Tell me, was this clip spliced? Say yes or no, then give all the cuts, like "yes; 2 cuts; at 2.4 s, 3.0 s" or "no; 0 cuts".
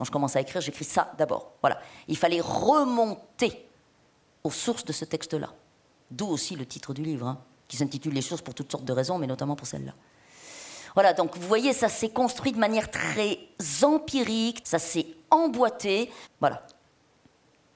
yes; 2 cuts; at 14.6 s, 16.3 s